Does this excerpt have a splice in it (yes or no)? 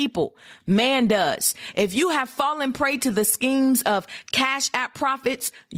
no